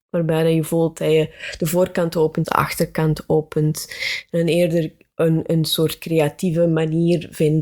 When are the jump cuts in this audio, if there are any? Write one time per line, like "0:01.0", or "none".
0:02.4